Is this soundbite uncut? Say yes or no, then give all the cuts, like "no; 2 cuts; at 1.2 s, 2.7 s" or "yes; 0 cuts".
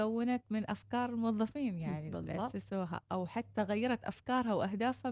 yes; 0 cuts